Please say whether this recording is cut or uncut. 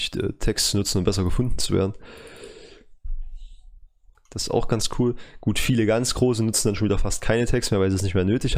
cut